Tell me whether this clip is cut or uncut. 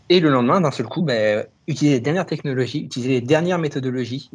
uncut